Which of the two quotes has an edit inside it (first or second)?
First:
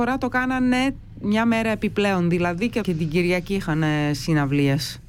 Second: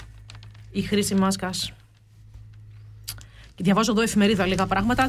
first